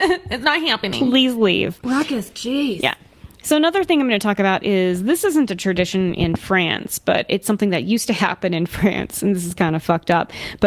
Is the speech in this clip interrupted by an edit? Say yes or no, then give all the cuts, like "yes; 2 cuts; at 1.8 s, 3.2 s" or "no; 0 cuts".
no; 0 cuts